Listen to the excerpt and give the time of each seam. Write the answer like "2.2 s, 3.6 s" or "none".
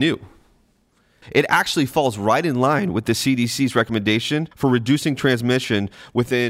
1.2 s, 4.5 s